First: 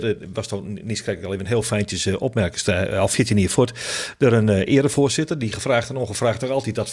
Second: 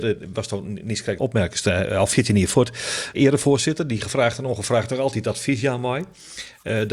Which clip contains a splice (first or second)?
second